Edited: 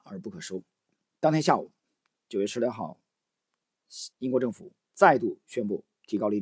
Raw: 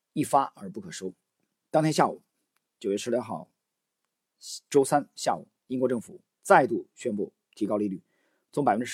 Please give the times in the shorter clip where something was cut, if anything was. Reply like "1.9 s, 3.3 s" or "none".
4.1 s

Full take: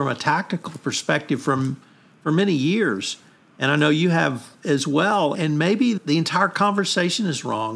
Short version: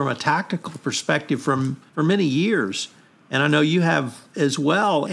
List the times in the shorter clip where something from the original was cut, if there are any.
1.9 s

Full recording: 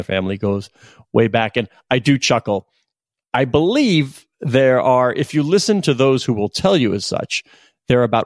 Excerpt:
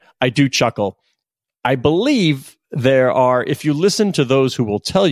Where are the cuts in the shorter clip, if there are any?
none

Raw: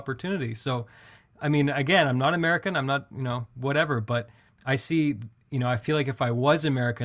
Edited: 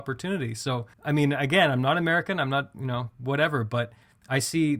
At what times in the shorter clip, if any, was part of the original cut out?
0.9 s

